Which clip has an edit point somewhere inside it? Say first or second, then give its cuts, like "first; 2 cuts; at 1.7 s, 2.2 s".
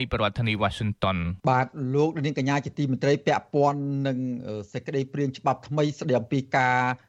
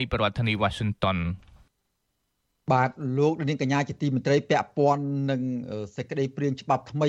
first; 1 cut; at 1.4 s